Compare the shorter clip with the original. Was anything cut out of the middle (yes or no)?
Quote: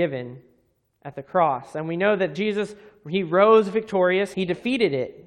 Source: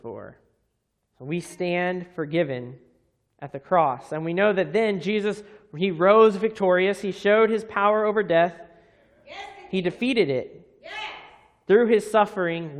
yes